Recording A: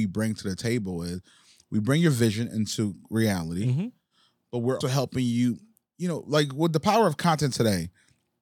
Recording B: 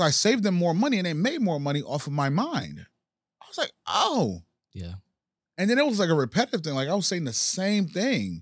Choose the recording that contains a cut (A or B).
A